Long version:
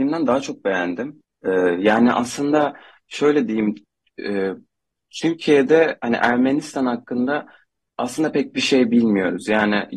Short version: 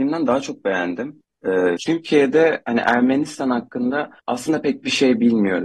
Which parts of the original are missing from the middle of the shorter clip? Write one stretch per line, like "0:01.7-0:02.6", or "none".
0:01.8-0:05.1
0:07.6-0:07.9